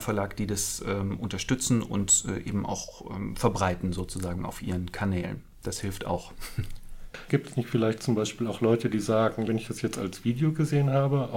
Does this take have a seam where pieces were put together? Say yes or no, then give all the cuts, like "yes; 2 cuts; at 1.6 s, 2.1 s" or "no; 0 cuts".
yes; 2 cuts; at 7.3 s, 9.5 s